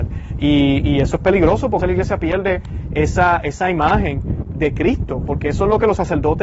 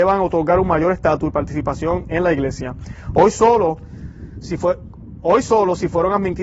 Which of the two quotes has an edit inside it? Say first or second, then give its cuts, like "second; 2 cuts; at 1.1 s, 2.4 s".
first; 1 cut; at 1.8 s